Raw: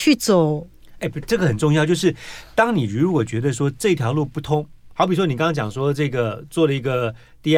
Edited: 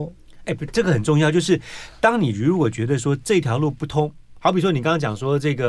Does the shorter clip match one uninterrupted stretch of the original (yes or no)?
yes